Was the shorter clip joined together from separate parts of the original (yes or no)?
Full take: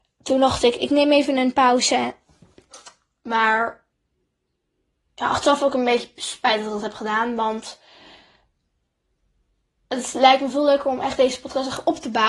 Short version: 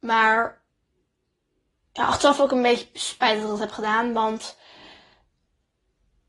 no